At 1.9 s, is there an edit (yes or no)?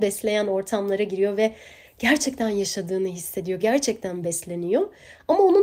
no